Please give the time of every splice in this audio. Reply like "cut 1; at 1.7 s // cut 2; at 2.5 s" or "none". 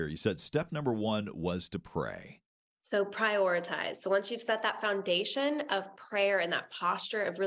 cut 1; at 2.8 s